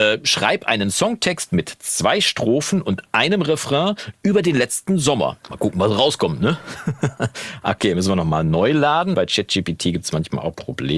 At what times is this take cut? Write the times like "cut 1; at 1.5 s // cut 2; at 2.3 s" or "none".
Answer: cut 1; at 5.4 s // cut 2; at 9.1 s